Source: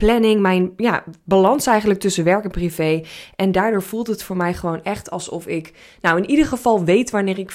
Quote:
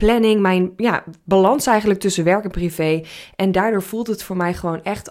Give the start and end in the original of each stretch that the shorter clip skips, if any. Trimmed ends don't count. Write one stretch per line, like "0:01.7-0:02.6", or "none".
none